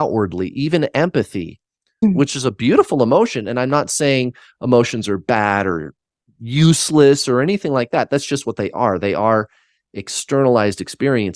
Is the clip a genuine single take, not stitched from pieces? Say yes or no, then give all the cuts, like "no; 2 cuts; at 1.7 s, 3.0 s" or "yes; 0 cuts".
yes; 0 cuts